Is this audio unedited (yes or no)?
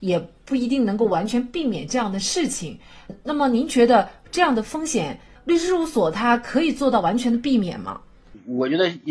yes